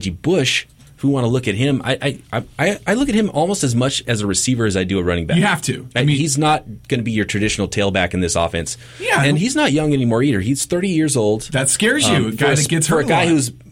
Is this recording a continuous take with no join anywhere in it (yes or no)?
yes